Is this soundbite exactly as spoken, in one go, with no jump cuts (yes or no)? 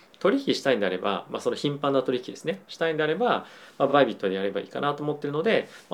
yes